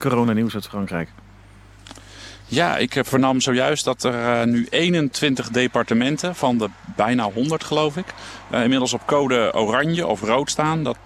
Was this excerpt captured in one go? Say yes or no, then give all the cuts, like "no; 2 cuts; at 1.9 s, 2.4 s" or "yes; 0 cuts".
yes; 0 cuts